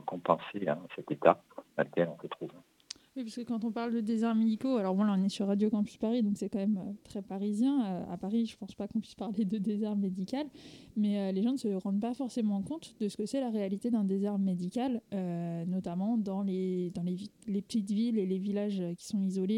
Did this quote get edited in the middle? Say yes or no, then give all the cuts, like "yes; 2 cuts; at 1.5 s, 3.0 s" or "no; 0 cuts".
no; 0 cuts